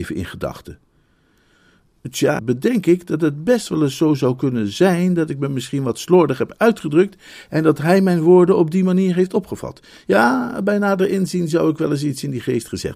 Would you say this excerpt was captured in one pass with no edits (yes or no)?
no